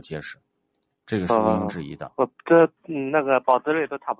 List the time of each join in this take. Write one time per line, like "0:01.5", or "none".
none